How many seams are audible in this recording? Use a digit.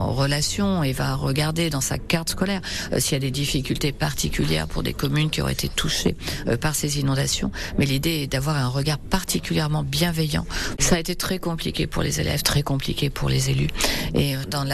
2